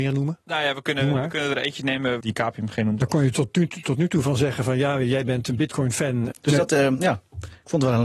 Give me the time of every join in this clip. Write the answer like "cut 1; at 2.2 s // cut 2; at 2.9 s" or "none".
cut 1; at 2.2 s // cut 2; at 6.3 s